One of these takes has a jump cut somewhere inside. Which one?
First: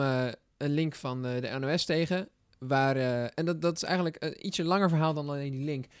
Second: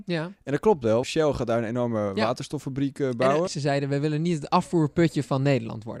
second; 2 cuts; at 1.0 s, 3.5 s

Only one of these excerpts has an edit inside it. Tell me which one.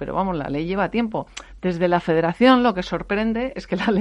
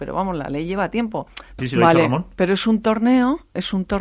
second; 1 cut; at 1.6 s

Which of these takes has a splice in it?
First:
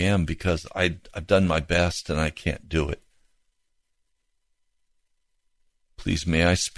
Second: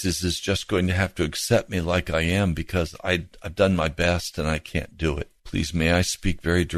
second; 1 cut; at 5.4 s

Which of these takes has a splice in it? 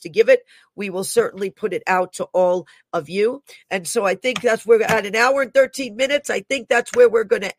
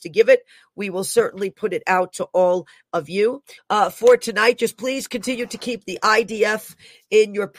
second; 1 cut; at 3.6 s

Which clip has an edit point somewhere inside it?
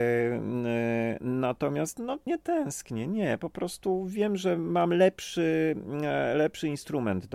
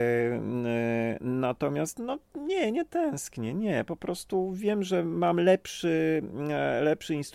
first; 1 cut; at 2.3 s

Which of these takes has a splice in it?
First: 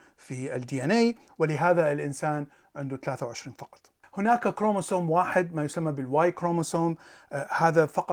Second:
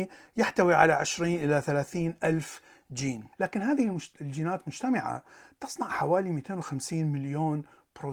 second; 1 cut; at 3.3 s

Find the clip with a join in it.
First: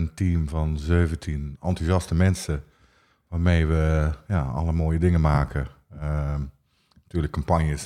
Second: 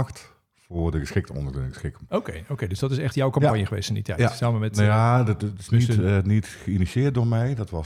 second; 1 cut; at 2.1 s

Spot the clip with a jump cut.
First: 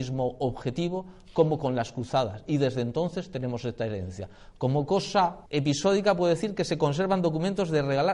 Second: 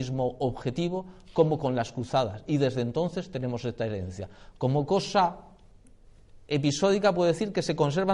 first; 1 cut; at 5.5 s

